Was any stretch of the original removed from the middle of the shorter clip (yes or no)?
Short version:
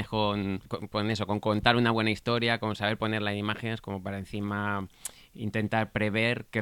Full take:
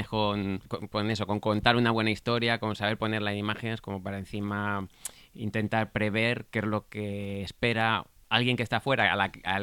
no